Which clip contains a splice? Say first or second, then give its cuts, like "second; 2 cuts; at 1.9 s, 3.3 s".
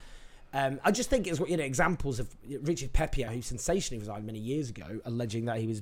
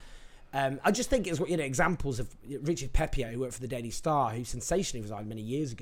first; 1 cut; at 3.3 s